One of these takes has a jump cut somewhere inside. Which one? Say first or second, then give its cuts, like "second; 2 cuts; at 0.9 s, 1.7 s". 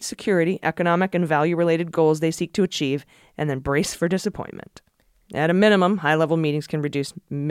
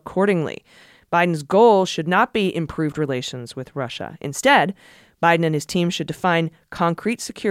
first; 1 cut; at 5.3 s